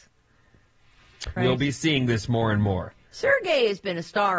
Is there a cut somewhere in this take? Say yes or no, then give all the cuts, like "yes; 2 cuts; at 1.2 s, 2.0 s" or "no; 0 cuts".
yes; 1 cut; at 1.4 s